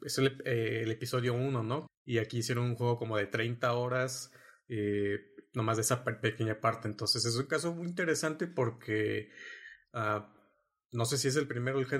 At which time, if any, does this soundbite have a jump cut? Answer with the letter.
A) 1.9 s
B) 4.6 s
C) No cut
A